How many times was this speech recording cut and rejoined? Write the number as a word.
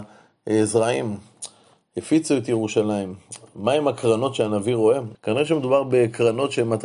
one